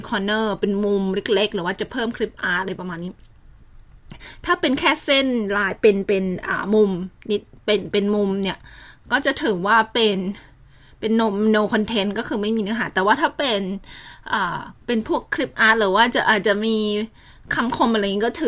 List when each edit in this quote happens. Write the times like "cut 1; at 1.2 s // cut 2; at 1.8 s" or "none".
cut 1; at 14.8 s